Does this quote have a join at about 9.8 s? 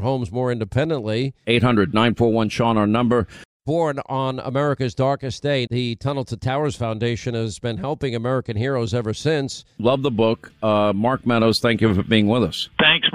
yes; 3 cuts; at 1.4 s, 5.7 s, 9.8 s

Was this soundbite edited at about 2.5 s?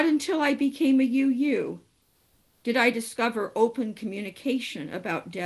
no; 0 cuts

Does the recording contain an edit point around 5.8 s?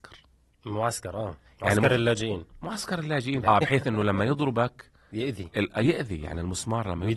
no; 1 cut; at 3.4 s

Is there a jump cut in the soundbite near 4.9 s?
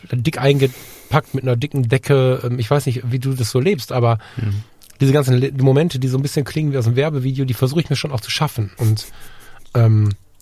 no; 1 cut; at 8.8 s

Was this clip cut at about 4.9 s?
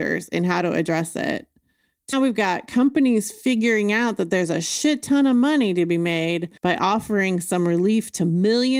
no; 2 cuts; at 2.1 s, 6.6 s

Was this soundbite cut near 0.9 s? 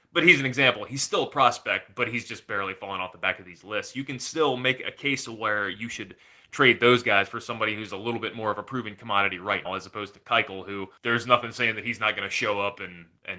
no; 2 cuts; at 9.7 s, 11.0 s

